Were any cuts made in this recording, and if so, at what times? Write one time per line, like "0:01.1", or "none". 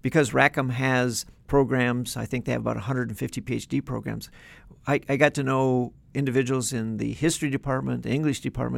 none